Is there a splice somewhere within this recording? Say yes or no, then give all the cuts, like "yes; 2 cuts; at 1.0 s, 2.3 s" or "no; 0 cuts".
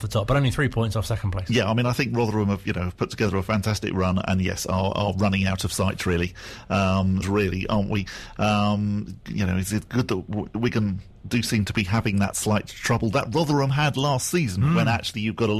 yes; 1 cut; at 7.2 s